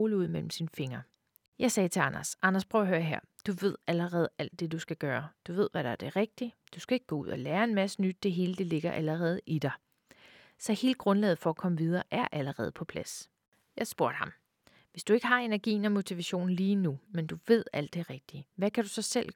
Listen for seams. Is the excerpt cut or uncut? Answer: uncut